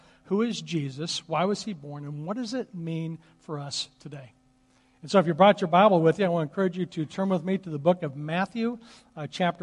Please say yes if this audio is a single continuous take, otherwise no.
yes